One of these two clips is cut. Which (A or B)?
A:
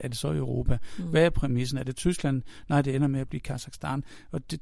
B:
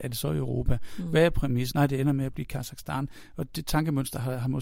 B